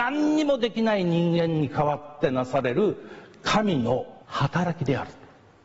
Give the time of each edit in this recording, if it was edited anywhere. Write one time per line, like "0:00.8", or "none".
0:04.2